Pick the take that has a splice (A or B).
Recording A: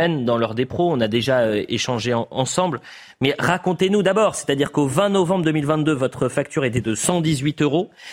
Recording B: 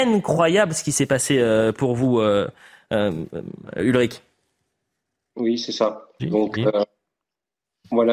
B